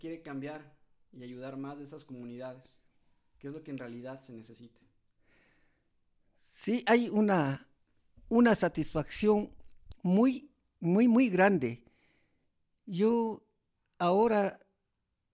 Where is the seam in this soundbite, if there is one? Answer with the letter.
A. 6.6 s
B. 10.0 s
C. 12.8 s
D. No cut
D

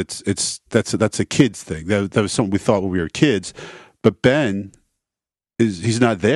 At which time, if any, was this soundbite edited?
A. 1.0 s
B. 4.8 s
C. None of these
C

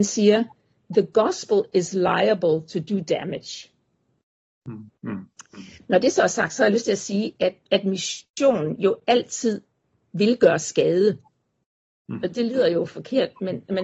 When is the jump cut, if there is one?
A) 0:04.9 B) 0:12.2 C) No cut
A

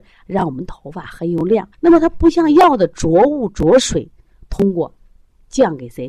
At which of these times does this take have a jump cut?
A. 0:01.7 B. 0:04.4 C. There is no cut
A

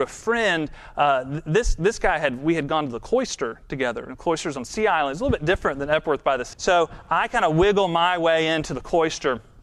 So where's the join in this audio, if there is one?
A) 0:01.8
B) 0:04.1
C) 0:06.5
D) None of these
C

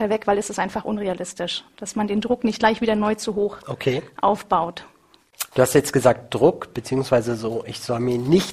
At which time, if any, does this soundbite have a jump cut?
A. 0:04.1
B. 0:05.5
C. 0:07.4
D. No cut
D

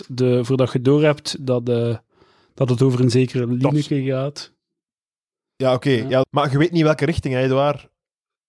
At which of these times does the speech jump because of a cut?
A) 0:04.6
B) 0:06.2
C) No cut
B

